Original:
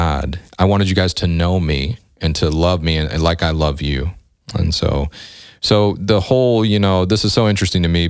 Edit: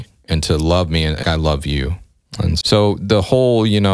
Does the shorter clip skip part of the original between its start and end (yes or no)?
yes